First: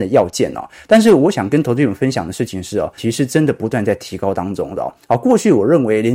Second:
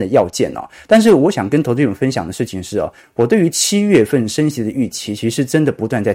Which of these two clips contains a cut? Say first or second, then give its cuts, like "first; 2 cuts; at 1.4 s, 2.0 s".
first; 1 cut; at 3.0 s